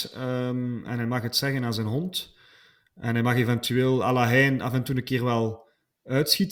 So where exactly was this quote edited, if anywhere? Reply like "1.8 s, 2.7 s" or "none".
none